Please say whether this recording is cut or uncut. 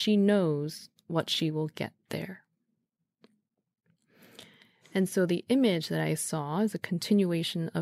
uncut